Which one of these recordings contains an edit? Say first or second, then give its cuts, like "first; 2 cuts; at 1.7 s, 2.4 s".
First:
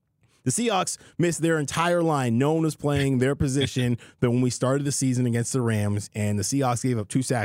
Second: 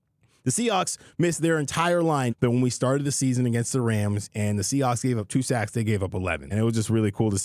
second; 2 cuts; at 2.3 s, 6.5 s